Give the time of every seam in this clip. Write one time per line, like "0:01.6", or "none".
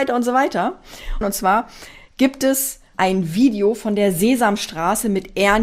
0:01.2
0:02.9